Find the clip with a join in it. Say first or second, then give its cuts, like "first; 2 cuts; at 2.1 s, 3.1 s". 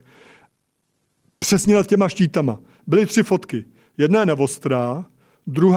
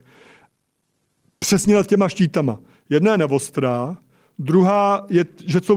second; 1 cut; at 2.8 s